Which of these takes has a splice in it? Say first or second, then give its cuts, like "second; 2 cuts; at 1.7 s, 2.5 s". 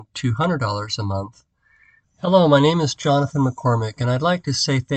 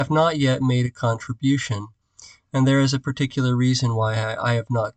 first; 1 cut; at 2.0 s